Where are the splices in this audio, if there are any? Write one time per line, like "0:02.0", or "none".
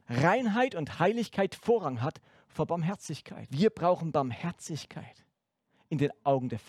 0:03.5